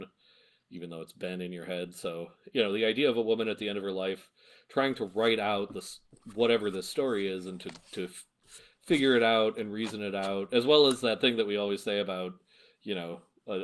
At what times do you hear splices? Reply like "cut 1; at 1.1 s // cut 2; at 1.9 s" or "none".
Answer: none